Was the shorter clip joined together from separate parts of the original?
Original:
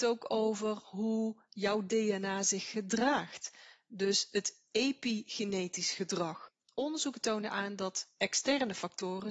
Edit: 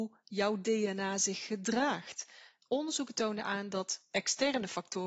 yes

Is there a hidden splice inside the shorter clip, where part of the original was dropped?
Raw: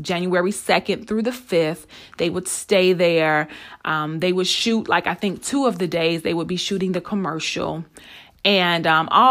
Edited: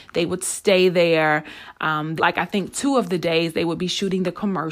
yes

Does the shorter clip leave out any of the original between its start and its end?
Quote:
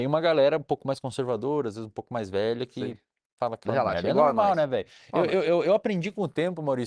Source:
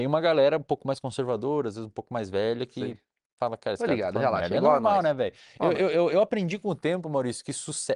yes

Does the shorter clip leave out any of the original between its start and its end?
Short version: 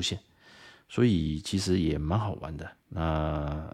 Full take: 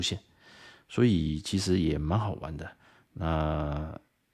yes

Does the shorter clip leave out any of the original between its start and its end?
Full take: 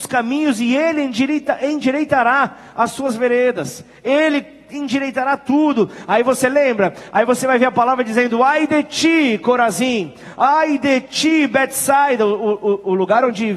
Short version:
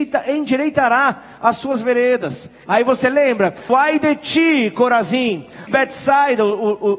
yes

